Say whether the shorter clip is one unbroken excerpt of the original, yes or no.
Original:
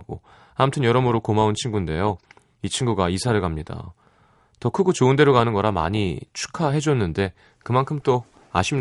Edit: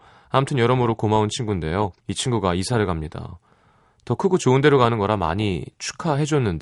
no